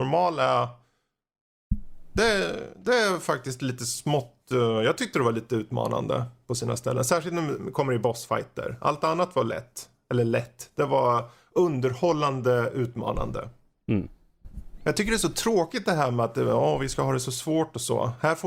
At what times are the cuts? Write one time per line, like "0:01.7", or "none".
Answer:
none